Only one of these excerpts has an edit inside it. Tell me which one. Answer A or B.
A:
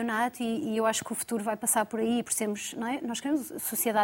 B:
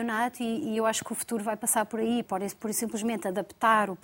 B